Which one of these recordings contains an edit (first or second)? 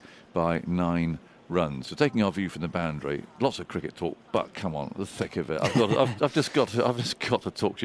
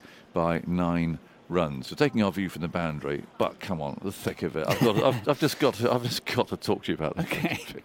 second